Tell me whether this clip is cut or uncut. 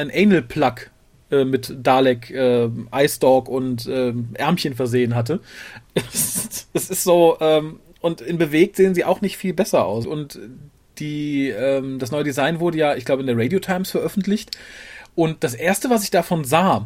cut